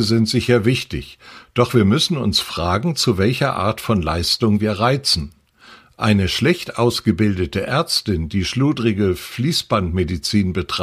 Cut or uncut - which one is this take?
uncut